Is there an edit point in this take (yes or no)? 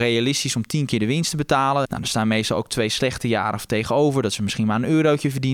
yes